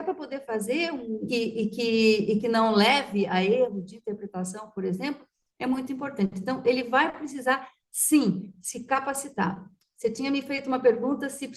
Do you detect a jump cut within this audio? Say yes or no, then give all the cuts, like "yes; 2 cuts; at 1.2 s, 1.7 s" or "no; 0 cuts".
yes; 1 cut; at 1.3 s